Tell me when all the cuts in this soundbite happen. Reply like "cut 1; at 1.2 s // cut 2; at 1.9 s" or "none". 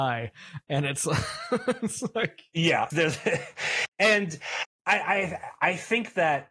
cut 1; at 2.9 s